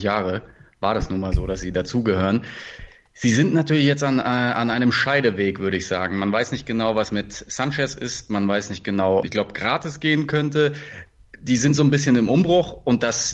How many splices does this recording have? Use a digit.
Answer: 1